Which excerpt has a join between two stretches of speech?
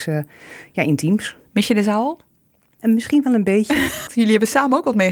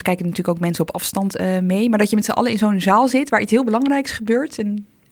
first; 1 cut; at 4.1 s

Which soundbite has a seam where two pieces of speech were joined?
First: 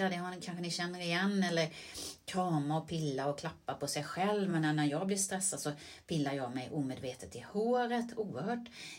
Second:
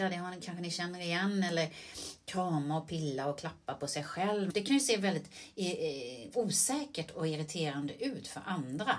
second; 1 cut; at 4.5 s

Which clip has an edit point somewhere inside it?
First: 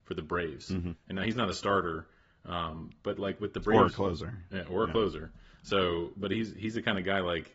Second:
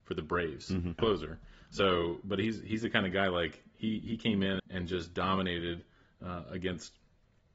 second; 2 cuts; at 1.0 s, 4.6 s

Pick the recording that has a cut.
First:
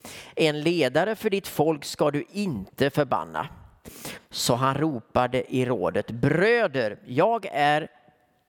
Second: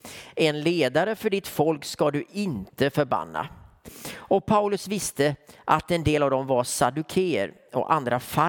first; 1 cut; at 4.2 s

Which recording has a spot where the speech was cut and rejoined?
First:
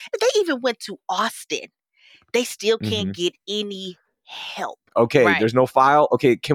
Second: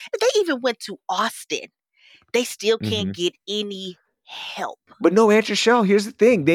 first; 1 cut; at 4.9 s

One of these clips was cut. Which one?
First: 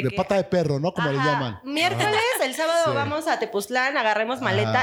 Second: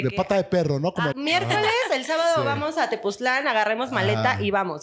second; 1 cut; at 1.1 s

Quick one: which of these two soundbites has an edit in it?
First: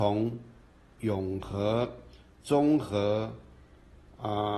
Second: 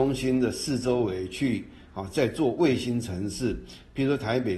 first; 1 cut; at 1.0 s

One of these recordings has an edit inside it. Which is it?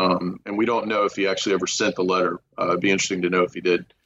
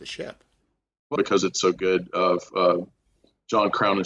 second; 1 cut; at 1.2 s

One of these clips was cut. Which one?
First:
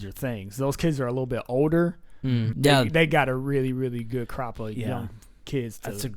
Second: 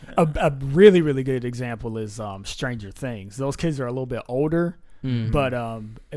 first; 1 cut; at 2.5 s

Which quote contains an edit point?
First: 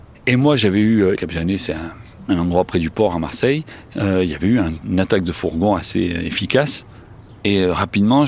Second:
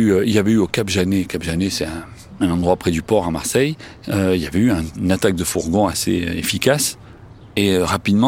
first; 1 cut; at 1.2 s

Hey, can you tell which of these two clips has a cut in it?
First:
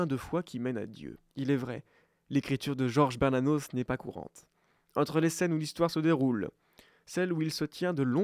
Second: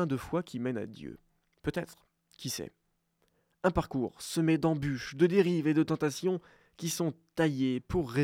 first; 1 cut; at 1.3 s

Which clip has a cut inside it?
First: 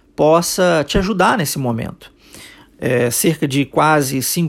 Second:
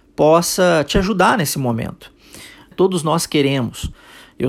second; 1 cut; at 2.7 s

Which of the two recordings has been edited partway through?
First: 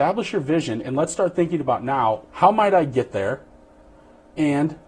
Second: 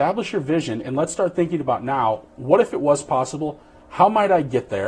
first; 1 cut; at 2.3 s

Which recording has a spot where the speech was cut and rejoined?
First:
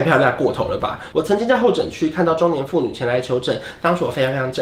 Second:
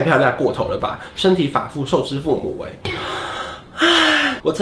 first; 1 cut; at 1.1 s

